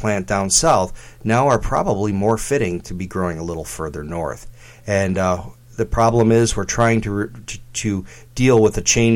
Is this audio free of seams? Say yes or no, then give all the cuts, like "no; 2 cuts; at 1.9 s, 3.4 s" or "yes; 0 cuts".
yes; 0 cuts